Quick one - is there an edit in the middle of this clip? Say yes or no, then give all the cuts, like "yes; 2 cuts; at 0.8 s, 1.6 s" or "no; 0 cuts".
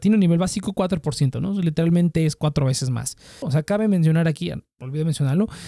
yes; 1 cut; at 3.4 s